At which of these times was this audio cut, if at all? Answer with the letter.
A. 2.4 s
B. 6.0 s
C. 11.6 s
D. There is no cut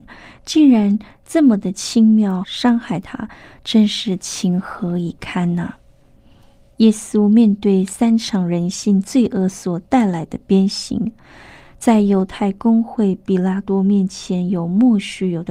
A